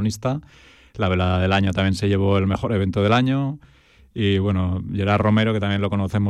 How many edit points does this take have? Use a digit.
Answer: 0